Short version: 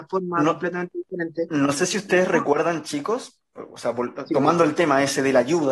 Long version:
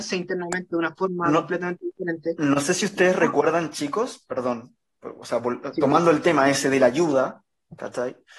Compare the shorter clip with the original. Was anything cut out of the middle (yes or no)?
yes